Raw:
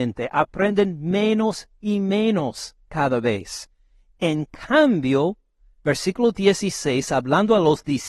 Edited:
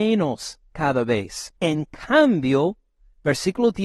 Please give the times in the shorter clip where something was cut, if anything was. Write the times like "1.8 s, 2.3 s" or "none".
1.6 s